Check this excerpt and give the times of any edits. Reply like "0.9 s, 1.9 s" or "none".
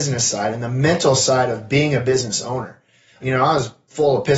3.2 s